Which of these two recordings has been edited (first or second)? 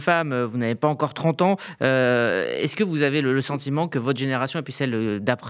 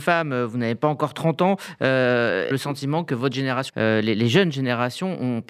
second